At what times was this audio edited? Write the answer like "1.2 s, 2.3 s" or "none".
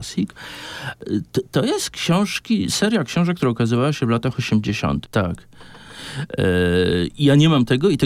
5.0 s